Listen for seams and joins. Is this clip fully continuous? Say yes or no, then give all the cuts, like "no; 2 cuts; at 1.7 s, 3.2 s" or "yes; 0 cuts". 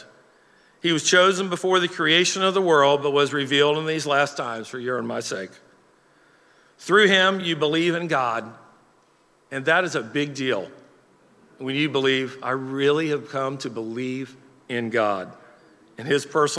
yes; 0 cuts